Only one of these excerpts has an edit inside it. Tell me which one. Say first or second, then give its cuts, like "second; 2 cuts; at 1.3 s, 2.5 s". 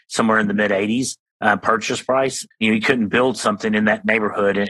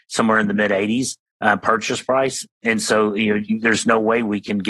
first; 1 cut; at 2.5 s